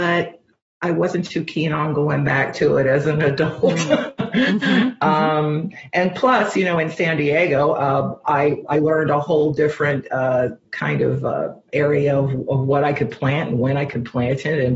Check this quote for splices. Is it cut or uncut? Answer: cut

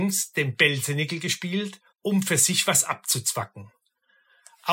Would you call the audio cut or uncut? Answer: cut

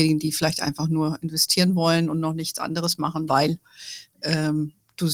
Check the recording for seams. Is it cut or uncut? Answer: cut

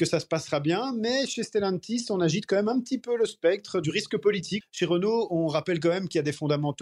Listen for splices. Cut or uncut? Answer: cut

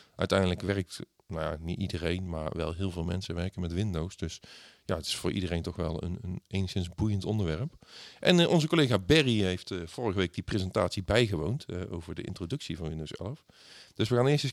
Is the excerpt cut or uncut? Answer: uncut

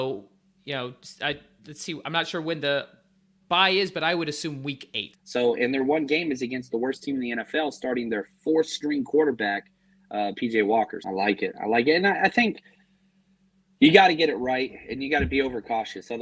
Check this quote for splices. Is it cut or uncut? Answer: cut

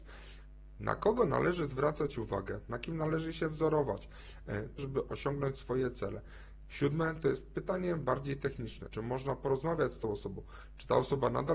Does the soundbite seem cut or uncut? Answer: cut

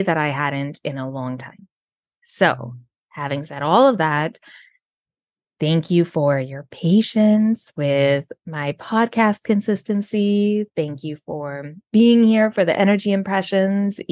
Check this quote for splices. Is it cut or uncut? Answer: uncut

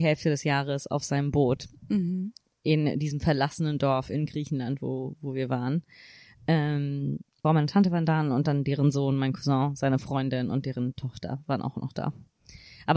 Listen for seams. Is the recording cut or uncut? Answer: cut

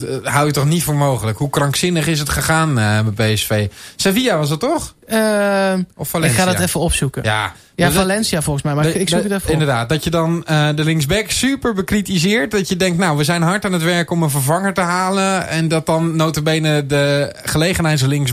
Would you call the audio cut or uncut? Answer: uncut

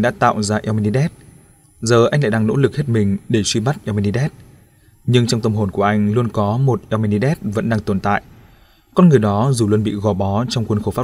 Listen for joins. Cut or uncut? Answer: uncut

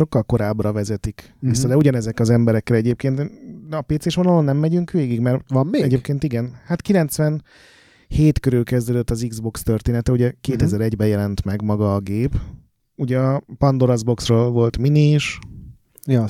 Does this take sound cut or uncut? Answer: cut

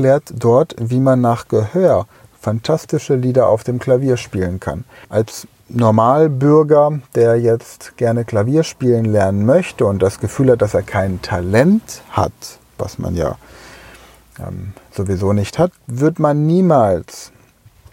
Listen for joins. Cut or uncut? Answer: cut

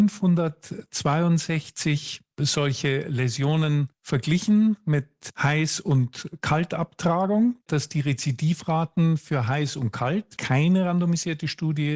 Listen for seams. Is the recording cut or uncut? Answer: cut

